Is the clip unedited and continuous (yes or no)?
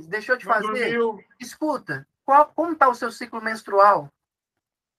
no